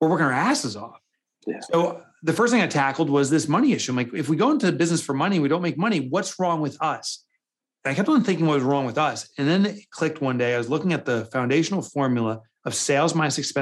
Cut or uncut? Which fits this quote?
uncut